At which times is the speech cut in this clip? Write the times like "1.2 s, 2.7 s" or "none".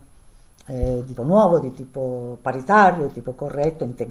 1.2 s

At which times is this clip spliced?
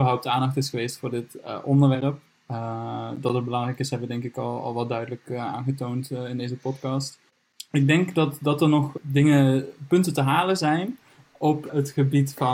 none

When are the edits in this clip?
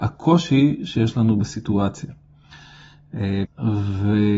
3.4 s

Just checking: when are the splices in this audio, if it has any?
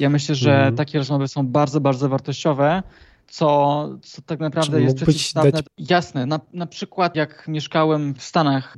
5.7 s

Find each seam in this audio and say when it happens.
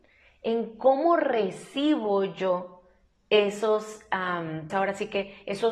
4.7 s

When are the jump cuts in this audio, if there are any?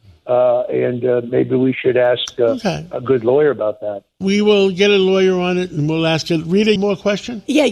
4.1 s, 6.8 s

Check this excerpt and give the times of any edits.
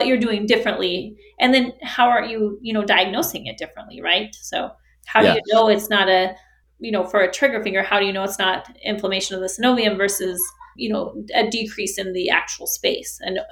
6.6 s, 10.8 s

